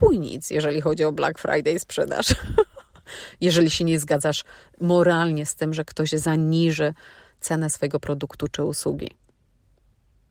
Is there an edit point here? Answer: no; 0 cuts

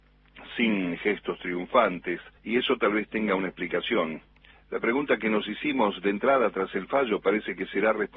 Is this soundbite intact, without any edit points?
no; 2 cuts; at 2.4 s, 4.5 s

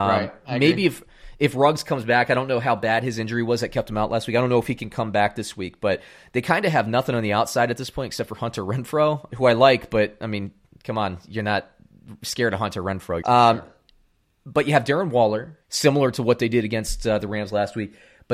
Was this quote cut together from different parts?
yes; 3 cuts; at 9.3 s, 13.2 s, 15.6 s

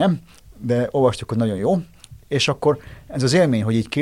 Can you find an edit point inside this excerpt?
no; 0 cuts

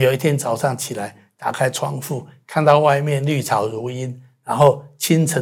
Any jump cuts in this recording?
no; 0 cuts

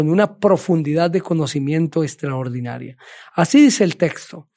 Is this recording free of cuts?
yes; 0 cuts

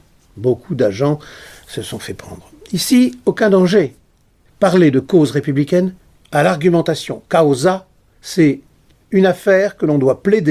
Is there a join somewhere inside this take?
yes; 2 cuts; at 4.5 s, 6.1 s

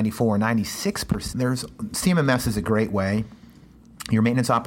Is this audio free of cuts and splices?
no; 1 cut; at 1.3 s

